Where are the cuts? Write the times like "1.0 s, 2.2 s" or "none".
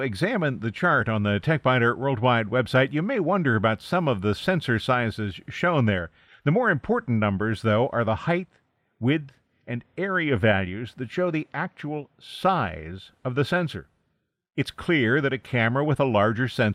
6.3 s